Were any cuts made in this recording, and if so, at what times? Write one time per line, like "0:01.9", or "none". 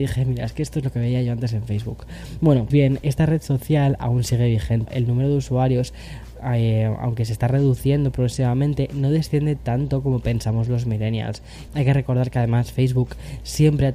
0:02.7
0:04.9
0:11.7